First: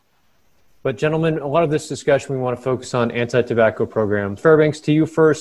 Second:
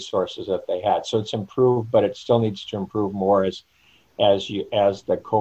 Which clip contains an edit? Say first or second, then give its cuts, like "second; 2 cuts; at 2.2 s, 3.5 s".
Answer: first; 1 cut; at 4.4 s